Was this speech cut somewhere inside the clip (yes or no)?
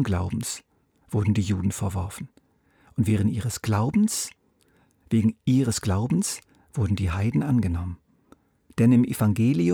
yes